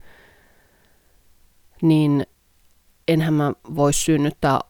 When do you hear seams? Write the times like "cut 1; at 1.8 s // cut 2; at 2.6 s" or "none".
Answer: none